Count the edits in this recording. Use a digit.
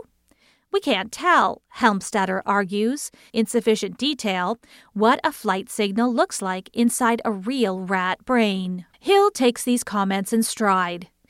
2